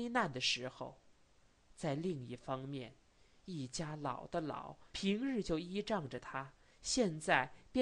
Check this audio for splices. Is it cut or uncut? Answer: cut